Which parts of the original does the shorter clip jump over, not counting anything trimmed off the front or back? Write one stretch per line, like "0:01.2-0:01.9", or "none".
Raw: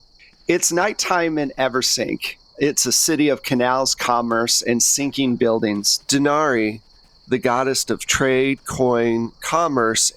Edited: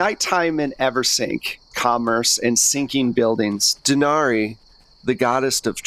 0:02.5-0:04.0